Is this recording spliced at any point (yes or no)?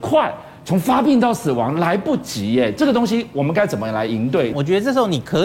yes